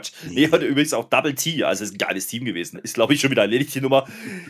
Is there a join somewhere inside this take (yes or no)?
yes